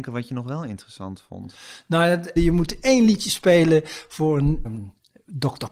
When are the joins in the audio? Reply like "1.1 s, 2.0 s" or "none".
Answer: 2.4 s, 4.6 s